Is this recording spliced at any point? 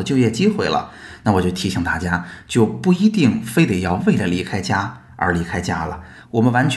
no; 0 cuts

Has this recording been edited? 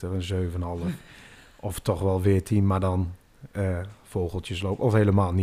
no; 0 cuts

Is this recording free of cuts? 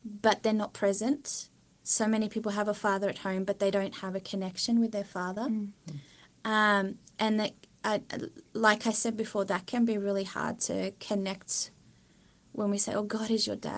yes; 0 cuts

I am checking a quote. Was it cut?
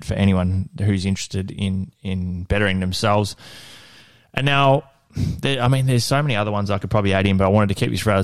no; 0 cuts

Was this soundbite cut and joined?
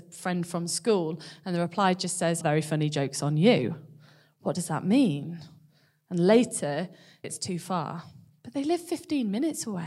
yes; 2 cuts; at 2.4 s, 7.2 s

